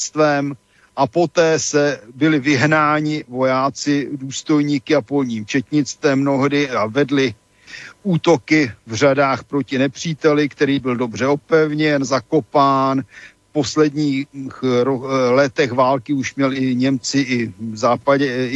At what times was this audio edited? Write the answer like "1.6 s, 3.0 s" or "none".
none